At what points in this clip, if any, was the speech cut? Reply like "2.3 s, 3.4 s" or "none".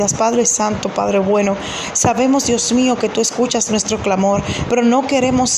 4.6 s